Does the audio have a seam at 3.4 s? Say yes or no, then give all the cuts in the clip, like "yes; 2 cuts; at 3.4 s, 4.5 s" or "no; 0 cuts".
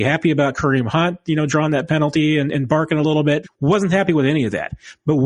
yes; 1 cut; at 3.4 s